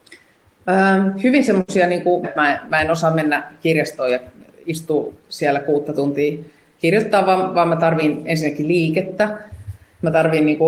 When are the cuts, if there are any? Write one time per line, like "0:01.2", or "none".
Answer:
0:02.2
0:05.2